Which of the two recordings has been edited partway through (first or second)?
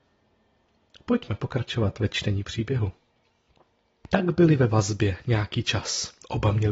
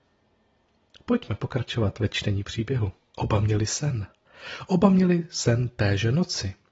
second